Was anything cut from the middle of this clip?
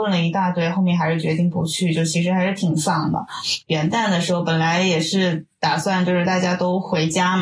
yes; 1 cut; at 3.6 s

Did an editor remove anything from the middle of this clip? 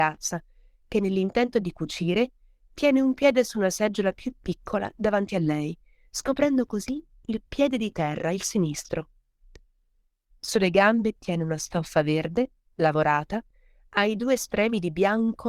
no; 0 cuts

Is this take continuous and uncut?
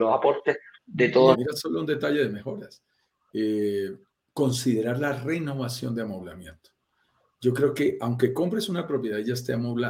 no; 1 cut; at 1.3 s

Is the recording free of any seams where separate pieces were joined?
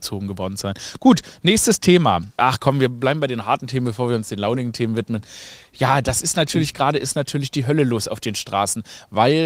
no; 1 cut; at 2.4 s

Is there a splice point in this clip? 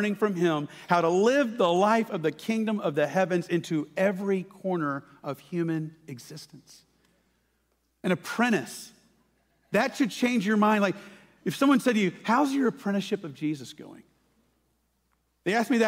no; 0 cuts

